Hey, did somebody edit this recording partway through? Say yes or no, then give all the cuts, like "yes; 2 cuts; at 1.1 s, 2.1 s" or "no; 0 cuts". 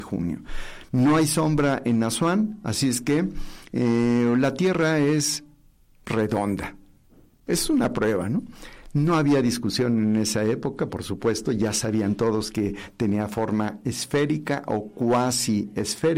no; 0 cuts